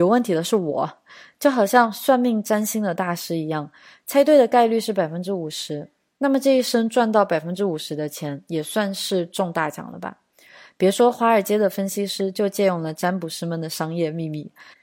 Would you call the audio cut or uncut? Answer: uncut